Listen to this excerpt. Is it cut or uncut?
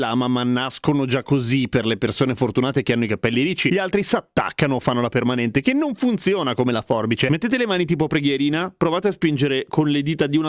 cut